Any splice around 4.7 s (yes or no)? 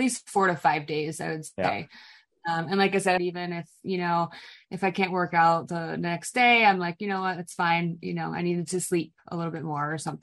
no